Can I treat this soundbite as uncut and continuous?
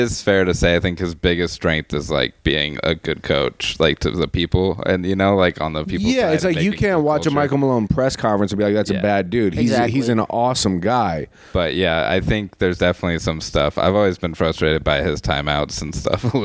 yes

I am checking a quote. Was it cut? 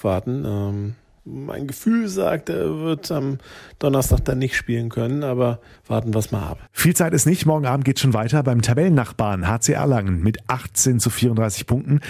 no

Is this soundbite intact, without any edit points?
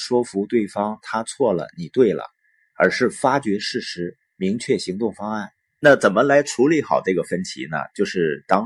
no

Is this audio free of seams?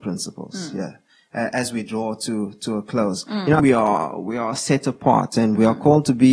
no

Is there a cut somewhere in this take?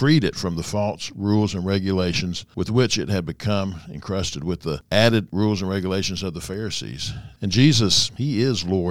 yes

